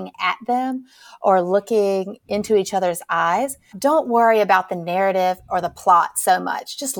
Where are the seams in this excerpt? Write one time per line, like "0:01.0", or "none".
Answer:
0:03.7